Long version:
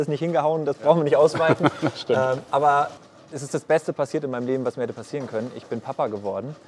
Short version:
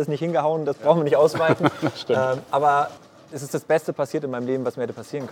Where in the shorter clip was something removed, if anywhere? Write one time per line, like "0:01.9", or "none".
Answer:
none